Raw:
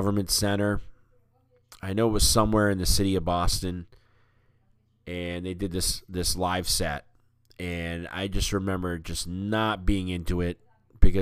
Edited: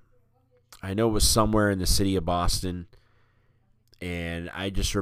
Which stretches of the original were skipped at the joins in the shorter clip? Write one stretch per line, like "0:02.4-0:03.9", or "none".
0:04.8-0:07.4